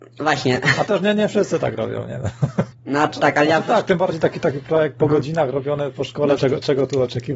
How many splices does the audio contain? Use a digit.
2